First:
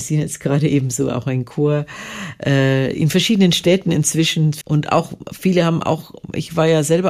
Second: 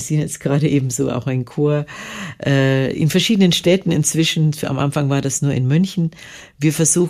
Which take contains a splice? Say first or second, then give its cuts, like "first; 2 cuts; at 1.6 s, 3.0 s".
first; 1 cut; at 4.6 s